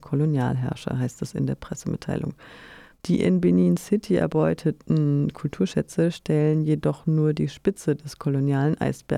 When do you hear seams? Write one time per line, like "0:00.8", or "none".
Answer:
0:02.9

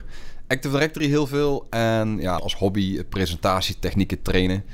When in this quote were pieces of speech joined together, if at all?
0:02.4

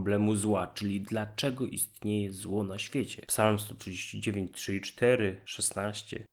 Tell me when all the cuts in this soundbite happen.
0:03.3

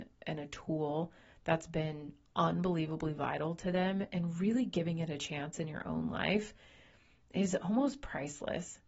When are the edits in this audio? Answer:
none

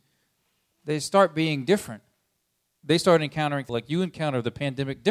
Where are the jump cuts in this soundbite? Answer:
0:03.7

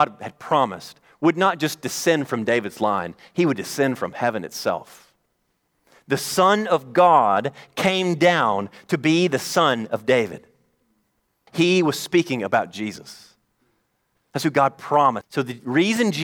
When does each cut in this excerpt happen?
0:11.5
0:15.2

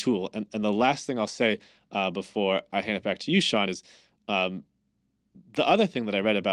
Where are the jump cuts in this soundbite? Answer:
none

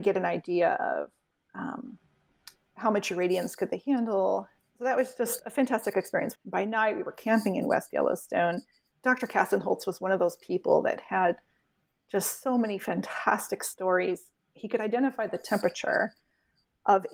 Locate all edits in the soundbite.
0:04.6
0:06.4
0:08.9

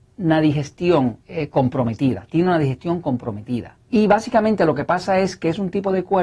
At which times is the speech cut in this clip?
0:01.2
0:03.8

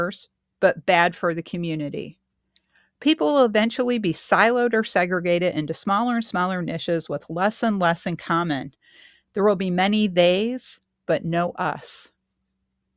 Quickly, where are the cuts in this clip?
none

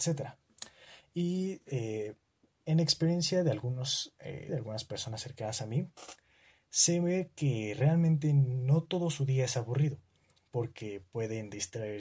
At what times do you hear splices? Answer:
0:04.5

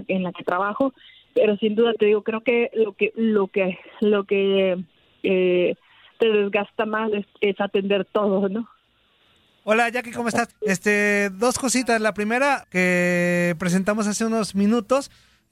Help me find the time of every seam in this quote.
0:10.5
0:12.6

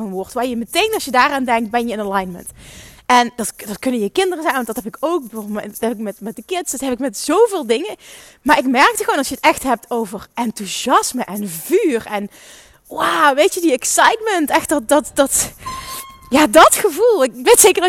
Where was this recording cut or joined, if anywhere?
none

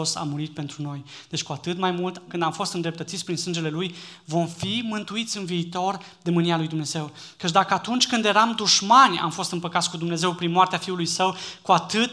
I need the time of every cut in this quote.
0:02.3

